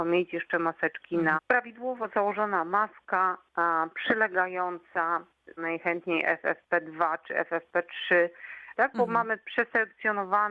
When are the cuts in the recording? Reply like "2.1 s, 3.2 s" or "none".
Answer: 1.4 s, 5.6 s, 8.7 s